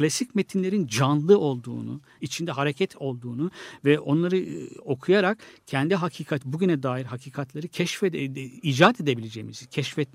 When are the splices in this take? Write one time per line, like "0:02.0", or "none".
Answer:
0:02.2